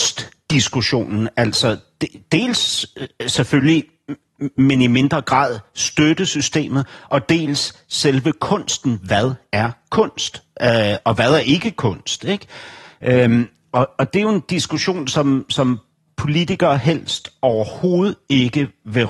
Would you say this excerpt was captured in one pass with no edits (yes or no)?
yes